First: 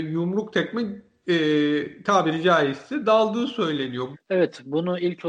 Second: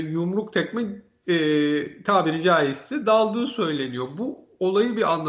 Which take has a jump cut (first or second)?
first